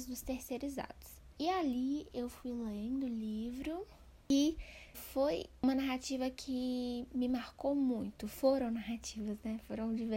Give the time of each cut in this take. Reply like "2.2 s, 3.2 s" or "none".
4.9 s